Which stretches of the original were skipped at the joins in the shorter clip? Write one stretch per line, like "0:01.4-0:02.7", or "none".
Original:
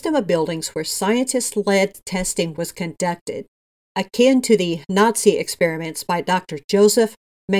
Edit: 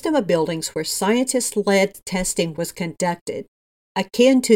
none